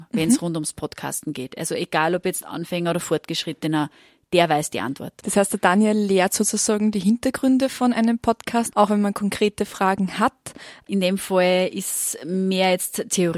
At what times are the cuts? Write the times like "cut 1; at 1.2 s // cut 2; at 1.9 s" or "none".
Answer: cut 1; at 8.7 s // cut 2; at 10.9 s